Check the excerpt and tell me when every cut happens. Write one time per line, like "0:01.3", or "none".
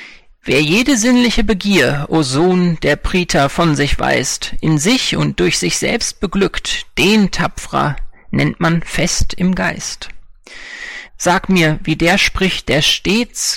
0:11.1
0:12.6